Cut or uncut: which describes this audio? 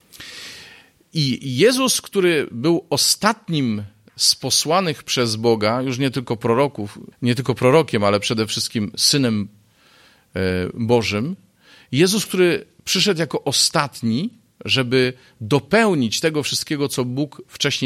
cut